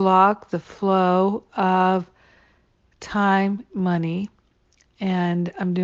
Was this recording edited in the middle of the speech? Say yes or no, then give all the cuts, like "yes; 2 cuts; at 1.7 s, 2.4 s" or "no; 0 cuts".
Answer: yes; 1 cut; at 3.7 s